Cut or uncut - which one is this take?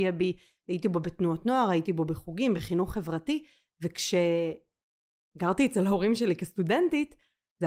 uncut